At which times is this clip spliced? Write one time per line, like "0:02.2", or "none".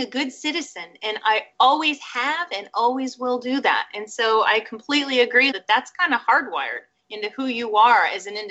0:05.5